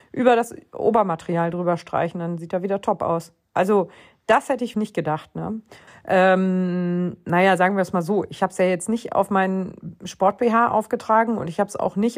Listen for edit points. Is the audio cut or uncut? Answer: cut